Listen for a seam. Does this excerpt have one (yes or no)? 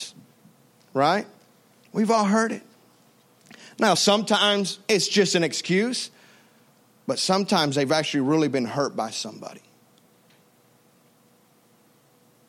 no